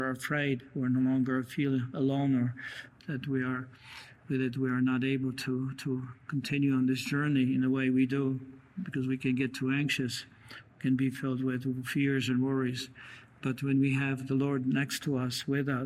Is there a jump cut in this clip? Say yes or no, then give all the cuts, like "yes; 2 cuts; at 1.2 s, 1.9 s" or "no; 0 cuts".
yes; 1 cut; at 3.0 s